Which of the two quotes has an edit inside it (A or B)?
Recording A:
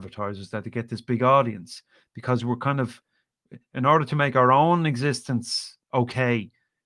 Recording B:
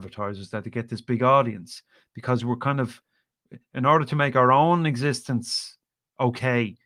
A